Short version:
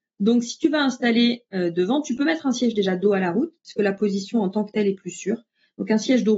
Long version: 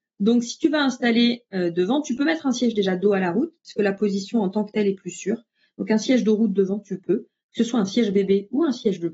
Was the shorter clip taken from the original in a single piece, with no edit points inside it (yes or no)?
yes